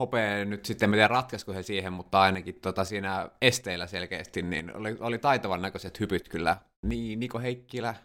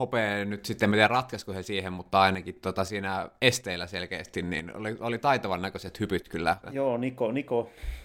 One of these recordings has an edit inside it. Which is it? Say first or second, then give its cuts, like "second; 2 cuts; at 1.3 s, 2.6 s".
second; 1 cut; at 6.6 s